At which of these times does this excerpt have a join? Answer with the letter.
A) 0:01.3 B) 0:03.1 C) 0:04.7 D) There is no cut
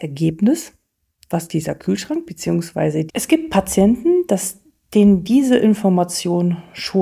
B